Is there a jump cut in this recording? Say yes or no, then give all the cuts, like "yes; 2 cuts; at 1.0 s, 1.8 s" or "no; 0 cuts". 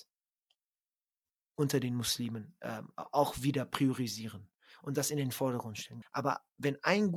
yes; 1 cut; at 6.0 s